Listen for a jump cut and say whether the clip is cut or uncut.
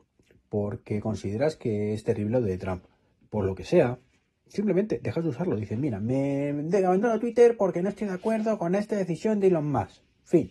uncut